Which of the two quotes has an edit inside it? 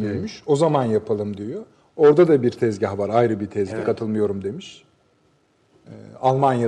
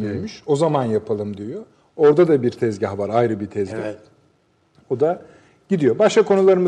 first; 1 cut; at 3.8 s

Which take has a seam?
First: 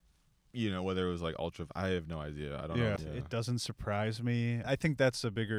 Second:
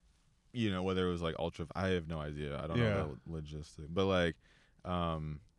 first; 2 cuts; at 3.0 s, 4.6 s

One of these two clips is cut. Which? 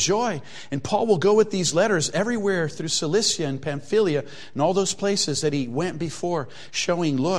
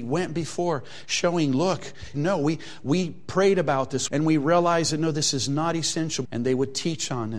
second; 3 cuts; at 2.1 s, 4.1 s, 6.2 s

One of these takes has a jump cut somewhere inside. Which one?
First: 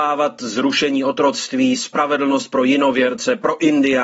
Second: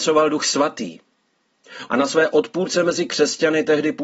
second; 1 cut; at 1.9 s

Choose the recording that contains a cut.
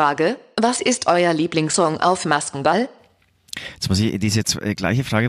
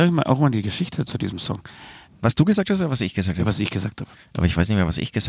second; 1 cut; at 2.1 s

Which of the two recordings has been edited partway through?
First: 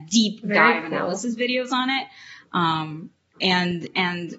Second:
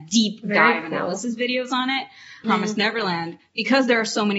second; 1 cut; at 2.4 s

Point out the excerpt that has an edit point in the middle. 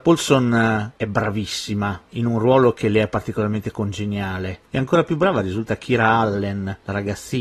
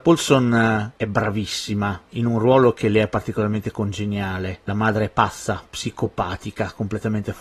first; 1 cut; at 4.6 s

